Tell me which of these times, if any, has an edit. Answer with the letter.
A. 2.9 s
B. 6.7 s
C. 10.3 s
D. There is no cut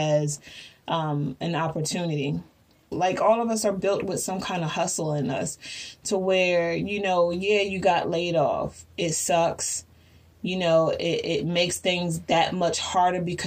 A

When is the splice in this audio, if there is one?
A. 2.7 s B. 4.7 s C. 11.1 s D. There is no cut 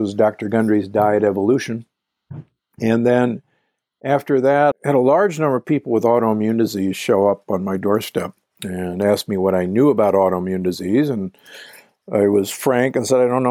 B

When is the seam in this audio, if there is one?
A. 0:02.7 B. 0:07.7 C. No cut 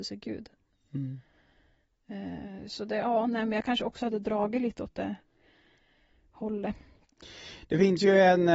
C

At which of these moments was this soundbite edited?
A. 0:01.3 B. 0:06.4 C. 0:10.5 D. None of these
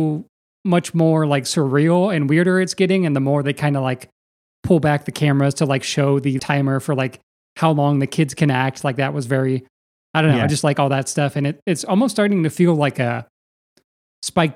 B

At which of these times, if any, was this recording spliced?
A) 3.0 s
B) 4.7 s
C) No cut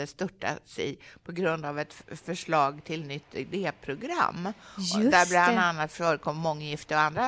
C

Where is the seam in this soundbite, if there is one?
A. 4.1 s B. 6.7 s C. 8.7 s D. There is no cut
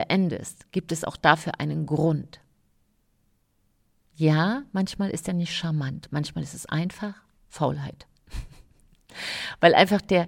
D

